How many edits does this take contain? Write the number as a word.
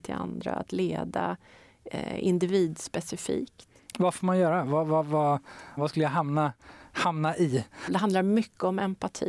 two